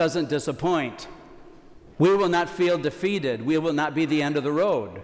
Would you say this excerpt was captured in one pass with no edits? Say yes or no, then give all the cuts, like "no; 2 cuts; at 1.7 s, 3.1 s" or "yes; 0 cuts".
no; 1 cut; at 1.9 s